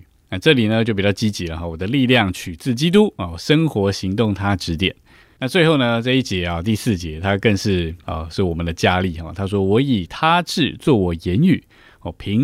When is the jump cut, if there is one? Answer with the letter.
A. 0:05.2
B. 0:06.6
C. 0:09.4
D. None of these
A